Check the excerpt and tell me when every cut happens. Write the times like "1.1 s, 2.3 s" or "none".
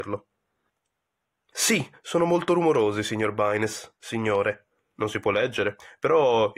none

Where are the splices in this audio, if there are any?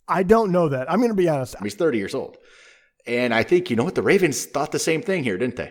1.6 s

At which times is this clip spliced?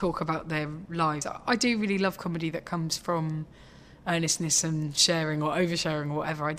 none

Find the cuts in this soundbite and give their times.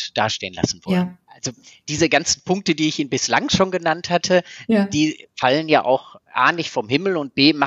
1.3 s

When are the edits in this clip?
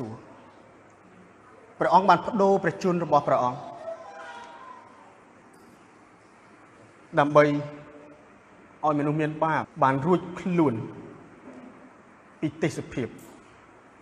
9.6 s

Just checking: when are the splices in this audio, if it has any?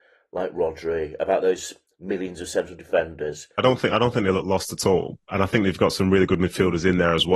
3.6 s

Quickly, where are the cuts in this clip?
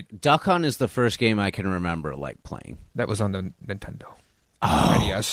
none

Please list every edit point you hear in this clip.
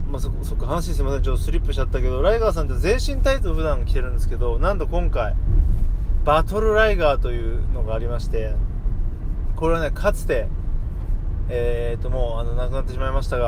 none

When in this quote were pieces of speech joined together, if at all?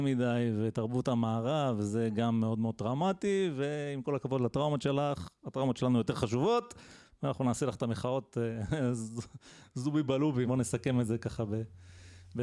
10.5 s

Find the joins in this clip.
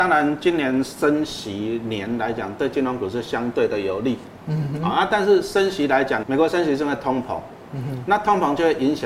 6.2 s

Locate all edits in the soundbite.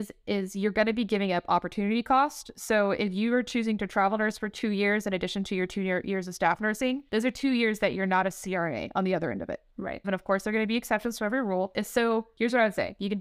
10.0 s, 11.7 s

